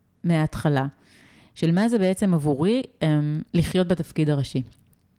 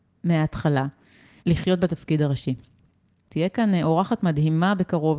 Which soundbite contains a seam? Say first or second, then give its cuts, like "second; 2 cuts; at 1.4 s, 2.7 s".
second; 2 cuts; at 1.4 s, 3.2 s